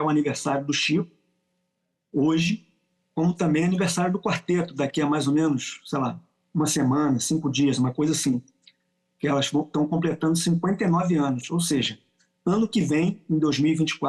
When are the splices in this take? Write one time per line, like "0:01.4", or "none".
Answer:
none